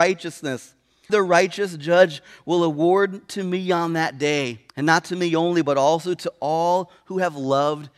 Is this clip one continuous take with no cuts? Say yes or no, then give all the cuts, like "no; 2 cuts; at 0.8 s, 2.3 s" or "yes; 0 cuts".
no; 2 cuts; at 1.1 s, 4.7 s